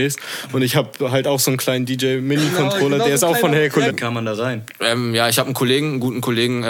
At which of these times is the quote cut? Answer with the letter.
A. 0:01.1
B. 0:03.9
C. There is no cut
B